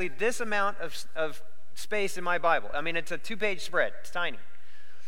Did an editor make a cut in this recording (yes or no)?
no